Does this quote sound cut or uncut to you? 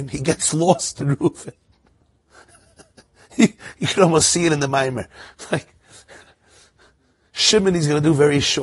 uncut